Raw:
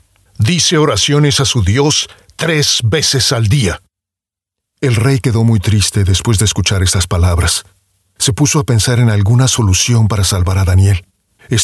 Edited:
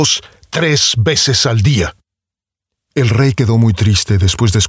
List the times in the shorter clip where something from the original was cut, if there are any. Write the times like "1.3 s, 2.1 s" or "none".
none